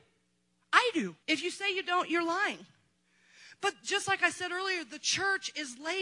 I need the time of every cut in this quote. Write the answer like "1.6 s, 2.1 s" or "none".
1.2 s